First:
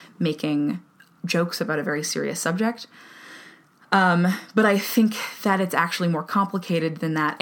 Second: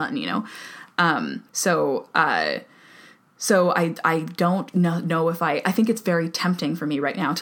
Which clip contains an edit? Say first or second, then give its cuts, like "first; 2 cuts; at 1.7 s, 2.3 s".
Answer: second; 1 cut; at 1.5 s